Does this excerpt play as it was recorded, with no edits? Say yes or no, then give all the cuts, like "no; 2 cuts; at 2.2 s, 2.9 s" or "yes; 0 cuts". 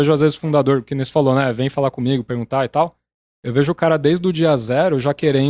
yes; 0 cuts